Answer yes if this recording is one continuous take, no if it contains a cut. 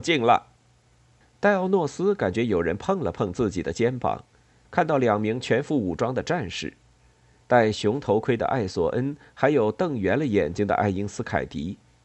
no